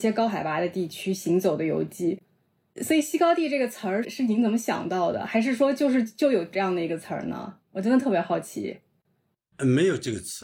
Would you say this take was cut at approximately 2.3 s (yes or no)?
no